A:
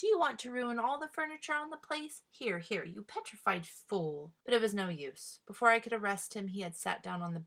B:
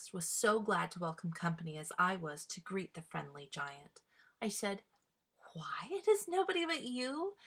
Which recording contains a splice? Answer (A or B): A